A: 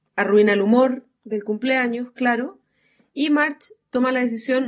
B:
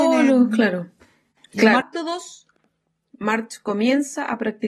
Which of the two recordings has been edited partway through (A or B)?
B